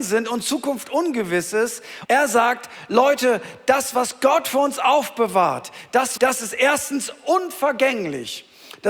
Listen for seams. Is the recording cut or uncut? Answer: cut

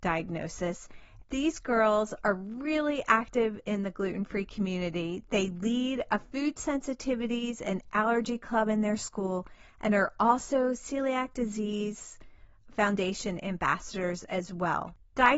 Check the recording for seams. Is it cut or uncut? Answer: cut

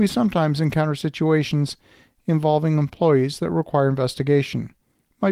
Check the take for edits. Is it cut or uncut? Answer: uncut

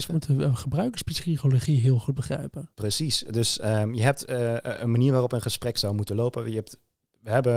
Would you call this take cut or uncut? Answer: uncut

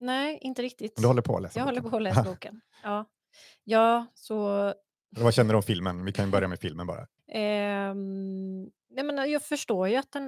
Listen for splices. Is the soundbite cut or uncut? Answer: cut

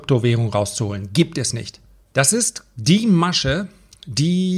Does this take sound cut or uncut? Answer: cut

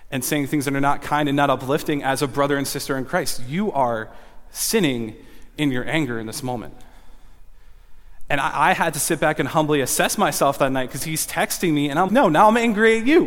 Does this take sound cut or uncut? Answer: cut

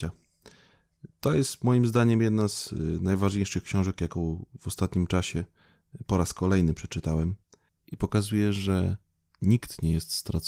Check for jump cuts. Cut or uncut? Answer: cut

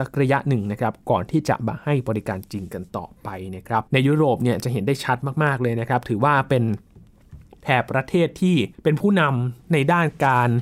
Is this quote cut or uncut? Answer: cut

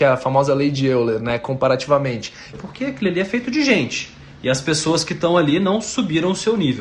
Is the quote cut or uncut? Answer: cut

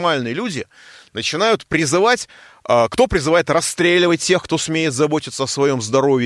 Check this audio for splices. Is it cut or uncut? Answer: uncut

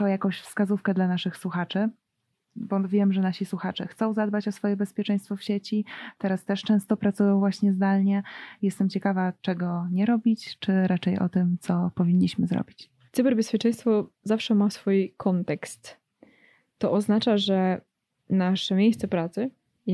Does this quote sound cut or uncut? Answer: cut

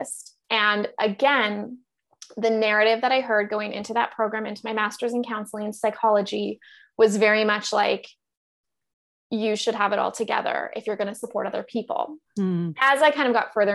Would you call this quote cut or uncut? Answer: uncut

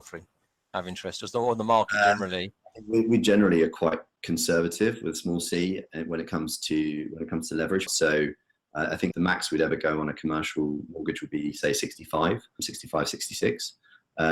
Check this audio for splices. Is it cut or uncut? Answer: cut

